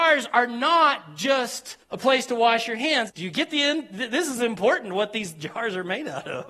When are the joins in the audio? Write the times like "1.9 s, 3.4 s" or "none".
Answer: 1.8 s, 3.1 s